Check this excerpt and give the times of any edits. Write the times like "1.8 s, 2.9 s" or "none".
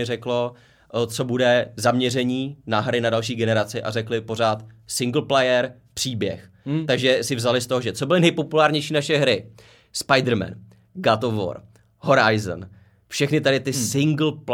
none